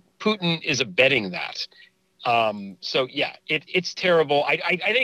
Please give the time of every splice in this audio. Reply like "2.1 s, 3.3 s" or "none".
none